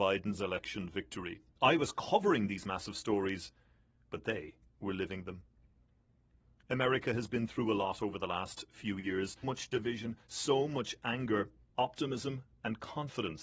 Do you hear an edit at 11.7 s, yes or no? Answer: yes